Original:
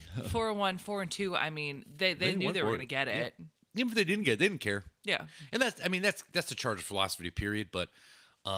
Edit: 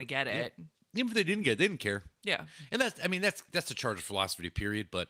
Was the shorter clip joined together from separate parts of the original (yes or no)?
no